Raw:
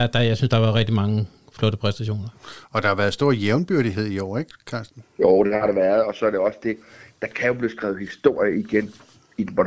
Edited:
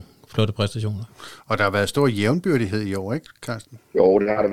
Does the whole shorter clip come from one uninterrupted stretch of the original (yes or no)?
yes